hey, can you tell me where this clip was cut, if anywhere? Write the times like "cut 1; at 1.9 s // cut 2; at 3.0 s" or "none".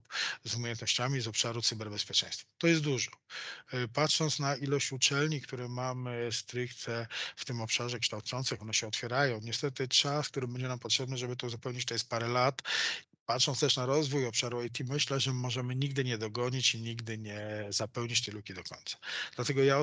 none